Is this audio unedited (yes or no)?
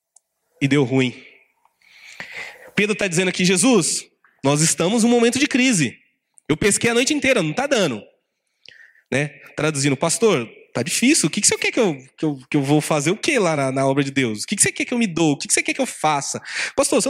yes